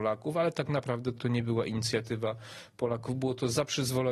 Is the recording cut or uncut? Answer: cut